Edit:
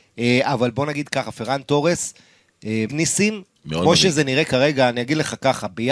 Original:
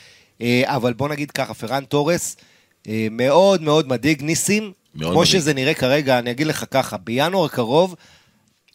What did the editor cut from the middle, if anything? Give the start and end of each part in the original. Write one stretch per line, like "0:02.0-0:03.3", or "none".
0:03.1-0:04.2